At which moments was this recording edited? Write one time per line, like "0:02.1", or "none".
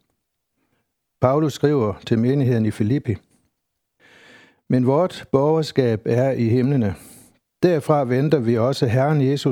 none